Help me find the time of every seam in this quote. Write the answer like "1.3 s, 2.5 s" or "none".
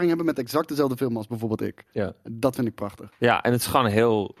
none